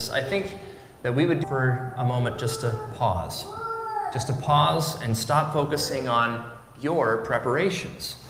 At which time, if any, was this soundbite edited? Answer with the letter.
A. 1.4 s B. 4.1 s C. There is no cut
A